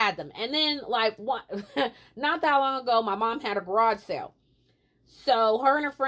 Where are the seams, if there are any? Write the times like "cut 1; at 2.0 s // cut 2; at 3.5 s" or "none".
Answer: none